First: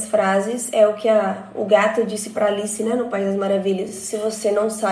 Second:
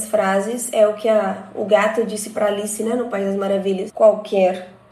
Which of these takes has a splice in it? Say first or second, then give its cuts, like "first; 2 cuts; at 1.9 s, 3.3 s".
second; 1 cut; at 3.9 s